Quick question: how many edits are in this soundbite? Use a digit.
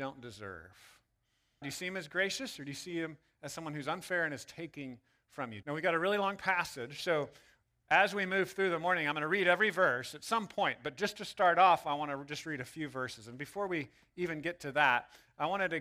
2